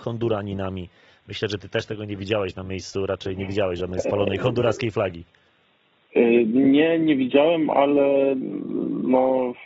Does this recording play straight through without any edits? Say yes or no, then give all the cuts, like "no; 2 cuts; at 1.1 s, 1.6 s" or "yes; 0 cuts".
yes; 0 cuts